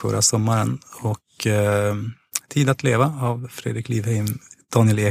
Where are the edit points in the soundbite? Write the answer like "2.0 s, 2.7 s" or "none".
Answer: none